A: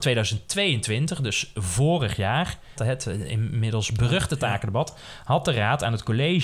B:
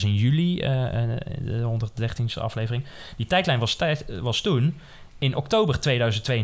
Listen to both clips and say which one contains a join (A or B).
A